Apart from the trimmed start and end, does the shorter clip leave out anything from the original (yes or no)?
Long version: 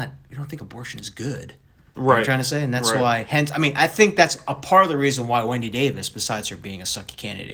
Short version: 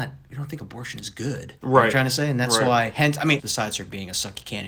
yes